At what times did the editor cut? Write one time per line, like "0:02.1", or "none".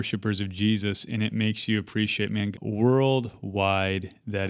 0:02.5

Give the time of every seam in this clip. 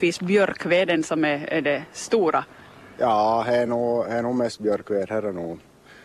none

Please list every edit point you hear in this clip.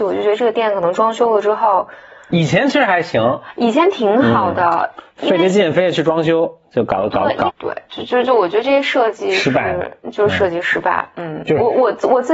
0:07.5

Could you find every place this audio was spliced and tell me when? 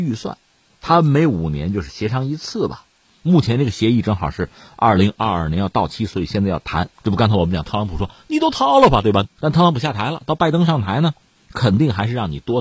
0:06.9
0:09.2

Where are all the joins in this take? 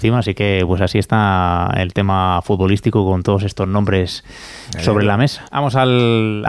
0:05.5

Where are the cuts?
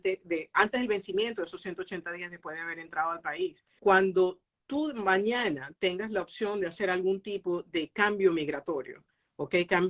0:03.8

